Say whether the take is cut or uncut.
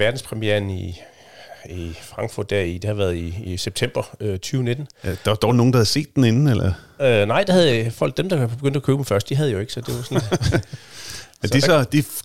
uncut